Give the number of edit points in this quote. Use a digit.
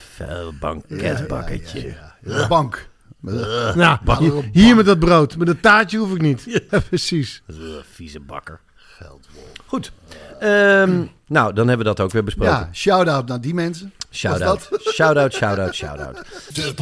1